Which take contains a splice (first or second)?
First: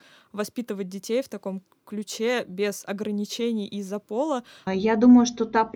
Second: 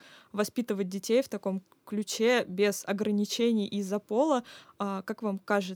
first